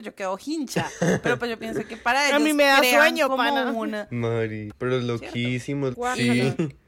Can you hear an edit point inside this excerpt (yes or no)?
yes